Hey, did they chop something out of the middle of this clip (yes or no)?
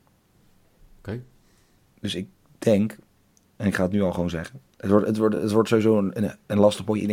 no